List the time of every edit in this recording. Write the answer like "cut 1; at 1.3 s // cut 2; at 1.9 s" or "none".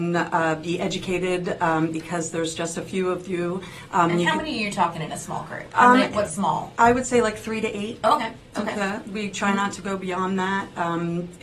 none